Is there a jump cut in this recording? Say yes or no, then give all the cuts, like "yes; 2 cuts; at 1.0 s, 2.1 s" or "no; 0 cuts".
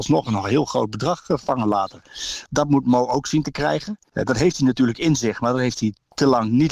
yes; 2 cuts; at 2.5 s, 4.1 s